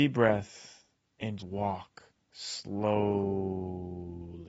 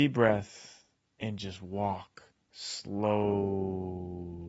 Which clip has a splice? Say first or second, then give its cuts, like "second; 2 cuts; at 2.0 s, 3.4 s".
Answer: first; 1 cut; at 1.4 s